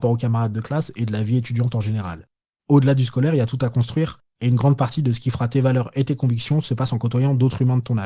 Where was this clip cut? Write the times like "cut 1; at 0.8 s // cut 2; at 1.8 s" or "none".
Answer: cut 1; at 2.6 s